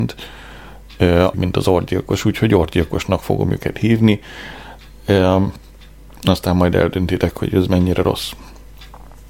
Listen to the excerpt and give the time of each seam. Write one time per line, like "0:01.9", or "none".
0:01.3